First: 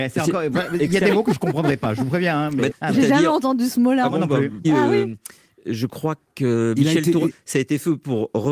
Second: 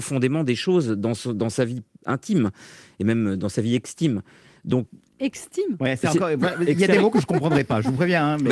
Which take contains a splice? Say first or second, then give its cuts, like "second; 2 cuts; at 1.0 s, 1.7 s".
first; 3 cuts; at 2.7 s, 4.6 s, 7.3 s